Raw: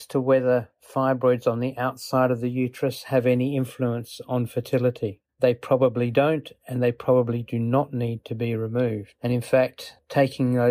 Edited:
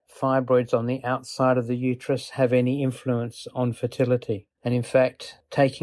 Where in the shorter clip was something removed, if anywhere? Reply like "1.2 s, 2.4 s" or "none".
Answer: 4.6 s